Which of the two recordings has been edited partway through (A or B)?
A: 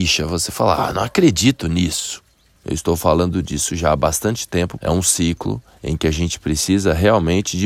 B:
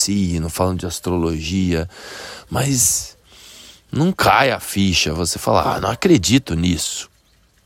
A